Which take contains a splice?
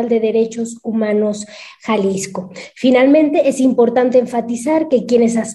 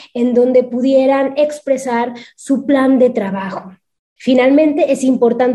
second; 1 cut; at 4.2 s

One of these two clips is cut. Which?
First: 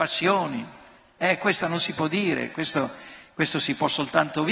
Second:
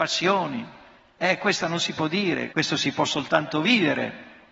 second; 1 cut; at 2.5 s

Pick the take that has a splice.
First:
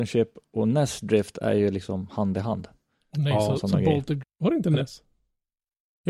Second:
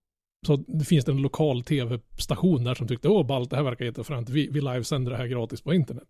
first; 1 cut; at 4.2 s

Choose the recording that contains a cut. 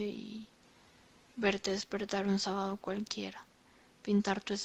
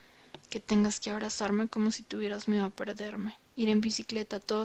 second; 1 cut; at 3.5 s

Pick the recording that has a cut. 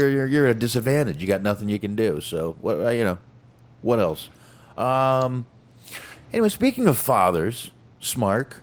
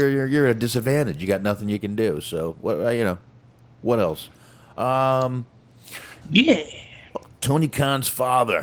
second; 1 cut; at 6.2 s

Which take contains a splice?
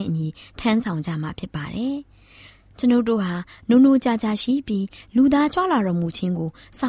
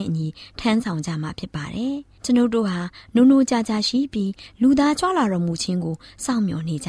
second; 1 cut; at 2.2 s

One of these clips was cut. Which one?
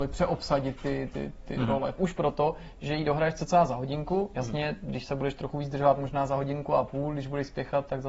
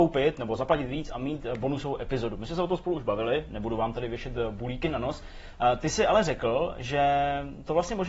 first; 1 cut; at 2.0 s

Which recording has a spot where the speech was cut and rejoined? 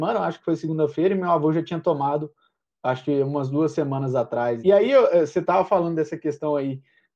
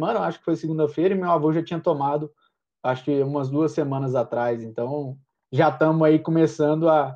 first; 1 cut; at 4.6 s

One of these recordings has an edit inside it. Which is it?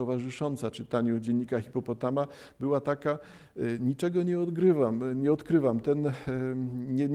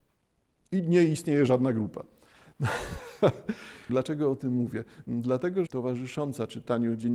second; 2 cuts; at 3.9 s, 5.7 s

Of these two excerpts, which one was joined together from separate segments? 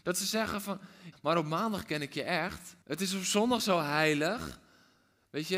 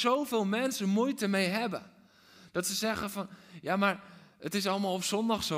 first; 2 cuts; at 1.1 s, 2.8 s

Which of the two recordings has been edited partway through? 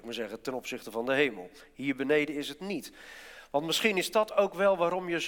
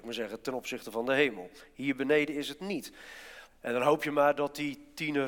second; 1 cut; at 3.5 s

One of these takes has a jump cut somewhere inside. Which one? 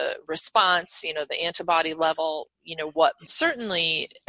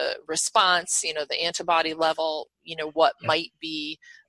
first; 1 cut; at 3.2 s

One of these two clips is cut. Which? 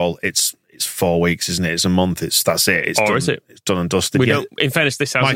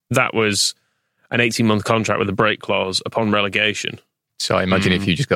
second; 1 cut; at 4.3 s

